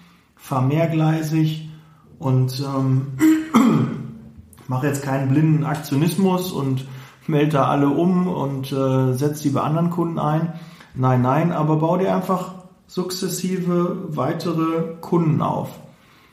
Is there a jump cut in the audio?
no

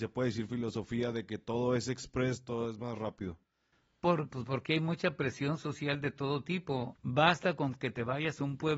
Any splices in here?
yes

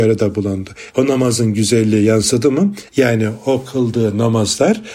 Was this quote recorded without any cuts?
no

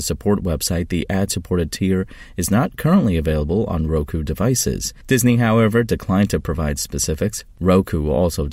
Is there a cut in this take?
yes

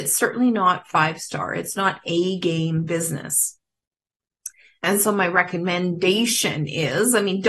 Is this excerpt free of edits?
yes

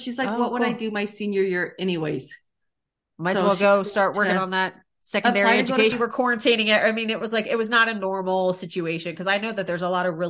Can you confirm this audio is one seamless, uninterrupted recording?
no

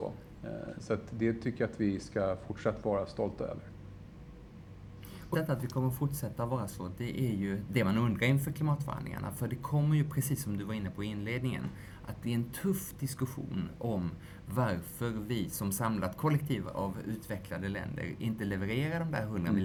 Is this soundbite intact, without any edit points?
no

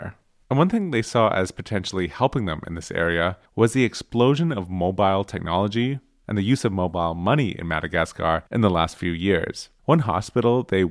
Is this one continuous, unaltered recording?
no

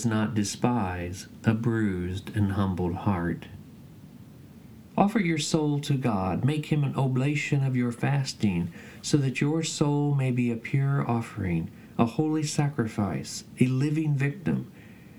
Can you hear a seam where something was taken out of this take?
no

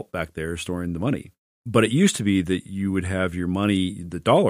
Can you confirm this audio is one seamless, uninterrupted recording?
yes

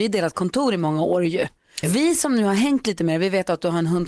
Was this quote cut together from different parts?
yes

